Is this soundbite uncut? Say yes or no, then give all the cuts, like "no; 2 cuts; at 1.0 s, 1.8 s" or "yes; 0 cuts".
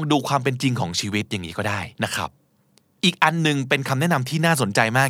no; 1 cut; at 1.9 s